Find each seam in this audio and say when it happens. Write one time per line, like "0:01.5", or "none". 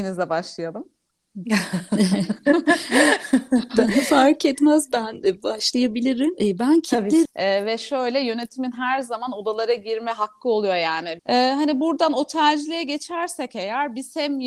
0:07.3
0:11.2